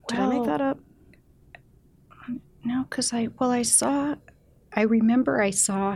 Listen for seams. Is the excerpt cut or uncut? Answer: uncut